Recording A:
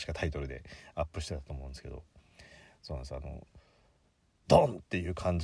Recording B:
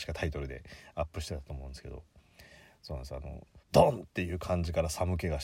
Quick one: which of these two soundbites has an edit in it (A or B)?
B